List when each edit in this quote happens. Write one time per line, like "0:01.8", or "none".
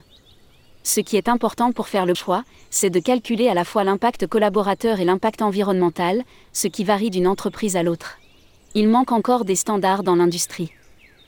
0:02.1
0:08.7